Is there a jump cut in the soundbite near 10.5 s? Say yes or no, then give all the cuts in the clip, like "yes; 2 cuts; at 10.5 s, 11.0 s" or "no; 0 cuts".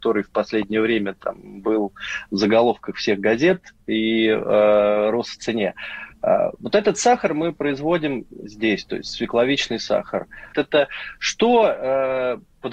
yes; 1 cut; at 10.5 s